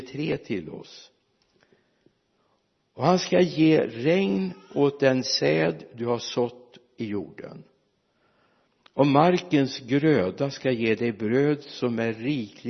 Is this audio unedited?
yes; 0 cuts

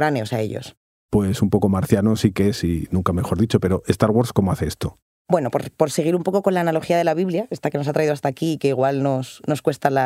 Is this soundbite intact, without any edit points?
yes; 0 cuts

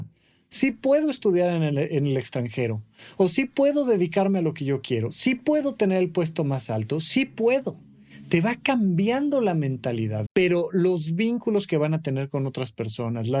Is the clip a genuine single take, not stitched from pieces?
no; 1 cut; at 10.3 s

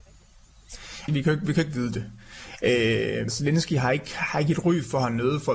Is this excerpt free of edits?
no; 2 cuts; at 1.1 s, 3.3 s

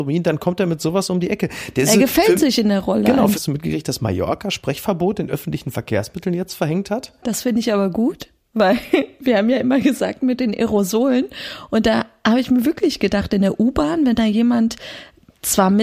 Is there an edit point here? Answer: yes; 1 cut; at 3.3 s

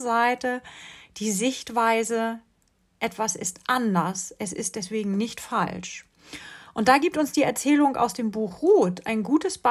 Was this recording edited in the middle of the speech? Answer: no; 0 cuts

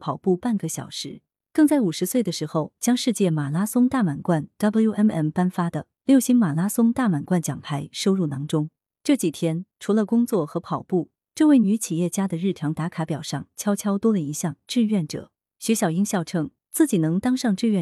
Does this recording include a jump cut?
no; 0 cuts

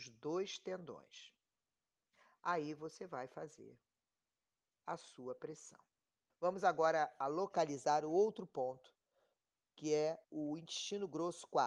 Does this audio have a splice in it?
yes; 2 cuts; at 6.3 s, 10.2 s

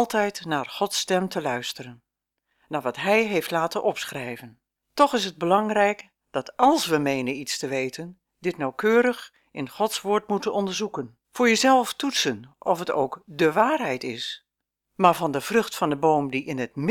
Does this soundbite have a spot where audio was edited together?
yes; 3 cuts; at 4.8 s, 11.2 s, 14.9 s

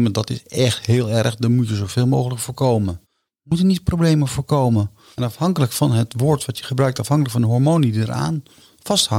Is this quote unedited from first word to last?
no; 2 cuts; at 3.0 s, 5.1 s

